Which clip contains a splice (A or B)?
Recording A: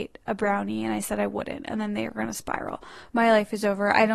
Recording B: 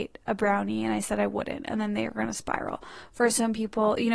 A